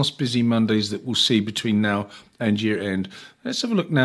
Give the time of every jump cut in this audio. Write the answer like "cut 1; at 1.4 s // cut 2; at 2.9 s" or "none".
none